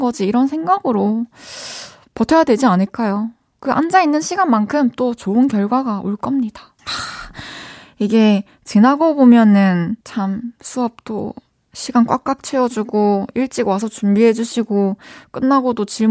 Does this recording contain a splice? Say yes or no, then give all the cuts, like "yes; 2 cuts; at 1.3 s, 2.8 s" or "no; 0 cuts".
yes; 2 cuts; at 6.8 s, 10.0 s